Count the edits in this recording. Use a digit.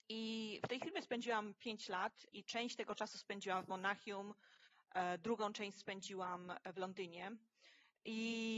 1